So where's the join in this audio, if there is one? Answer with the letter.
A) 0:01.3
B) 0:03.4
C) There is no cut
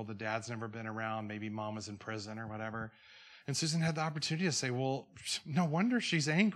C